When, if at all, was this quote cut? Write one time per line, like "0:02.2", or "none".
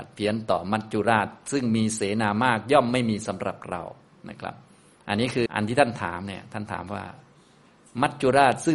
0:05.5